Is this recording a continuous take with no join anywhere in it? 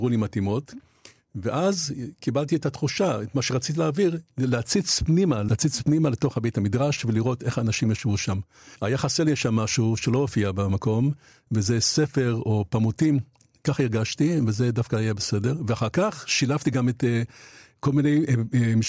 yes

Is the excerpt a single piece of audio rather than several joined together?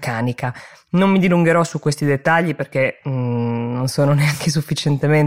yes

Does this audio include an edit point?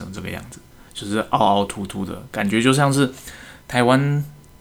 no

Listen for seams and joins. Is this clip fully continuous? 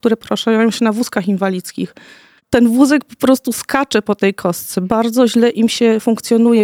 no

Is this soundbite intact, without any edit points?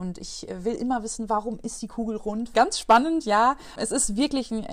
no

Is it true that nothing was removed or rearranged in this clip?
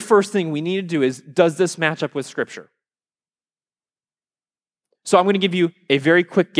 yes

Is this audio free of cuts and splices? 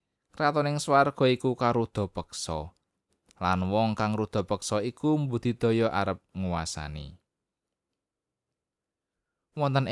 yes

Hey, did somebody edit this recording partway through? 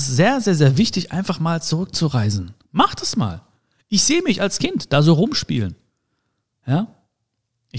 yes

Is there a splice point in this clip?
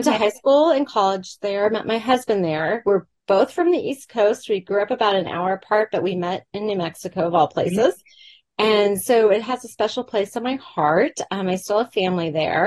no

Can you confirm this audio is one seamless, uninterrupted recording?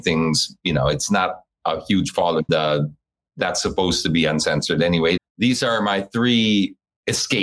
no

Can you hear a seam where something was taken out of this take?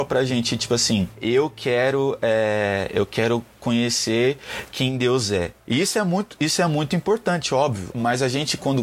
yes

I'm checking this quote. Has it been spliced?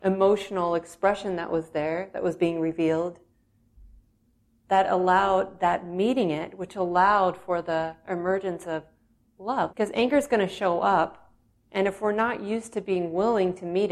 yes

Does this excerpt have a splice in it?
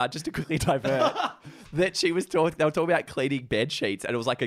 no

